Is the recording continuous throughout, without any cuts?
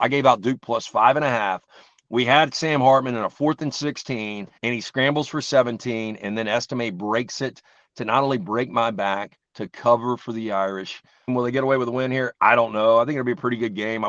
no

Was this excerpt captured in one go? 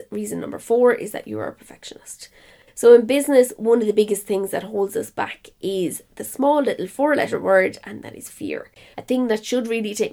no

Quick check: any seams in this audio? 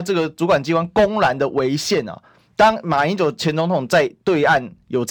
no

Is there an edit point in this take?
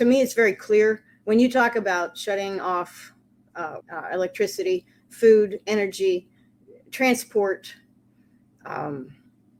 yes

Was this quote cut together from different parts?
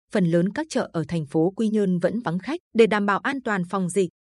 yes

